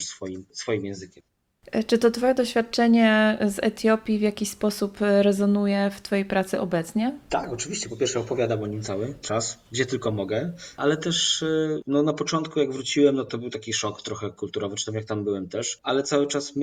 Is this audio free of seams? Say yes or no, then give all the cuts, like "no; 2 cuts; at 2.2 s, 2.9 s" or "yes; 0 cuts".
yes; 0 cuts